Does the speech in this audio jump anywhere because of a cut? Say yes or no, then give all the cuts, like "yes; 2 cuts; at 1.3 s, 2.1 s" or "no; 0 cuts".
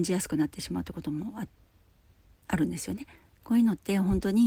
yes; 1 cut; at 3.4 s